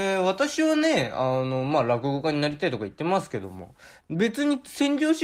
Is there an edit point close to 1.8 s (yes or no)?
no